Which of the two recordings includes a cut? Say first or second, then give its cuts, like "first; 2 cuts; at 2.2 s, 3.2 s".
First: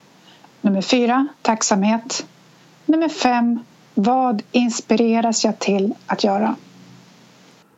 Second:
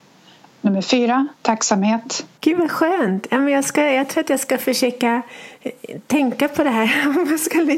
second; 1 cut; at 2.4 s